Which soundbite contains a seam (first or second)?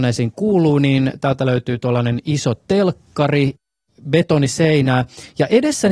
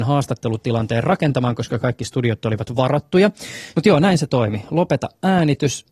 second